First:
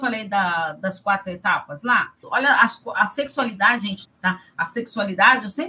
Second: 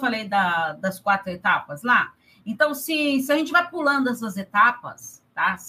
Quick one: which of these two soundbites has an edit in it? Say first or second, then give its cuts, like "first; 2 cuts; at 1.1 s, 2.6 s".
first; 2 cuts; at 2.2 s, 4.1 s